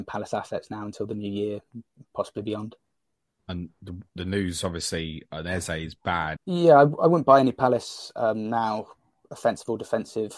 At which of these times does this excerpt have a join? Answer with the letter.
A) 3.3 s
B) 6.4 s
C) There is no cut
B